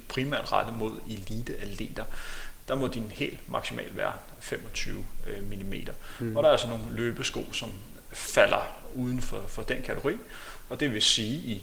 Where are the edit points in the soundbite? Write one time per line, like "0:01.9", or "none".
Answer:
none